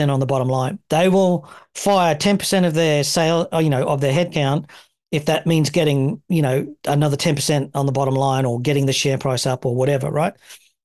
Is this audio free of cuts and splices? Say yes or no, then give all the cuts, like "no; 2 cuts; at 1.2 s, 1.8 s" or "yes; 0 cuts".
yes; 0 cuts